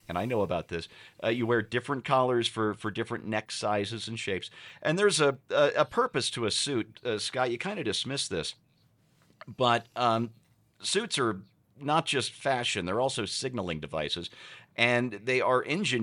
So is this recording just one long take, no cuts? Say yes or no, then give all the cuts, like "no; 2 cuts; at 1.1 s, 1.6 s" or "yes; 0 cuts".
yes; 0 cuts